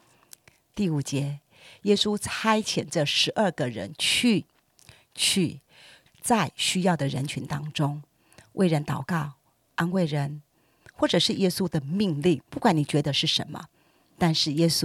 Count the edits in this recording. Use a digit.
3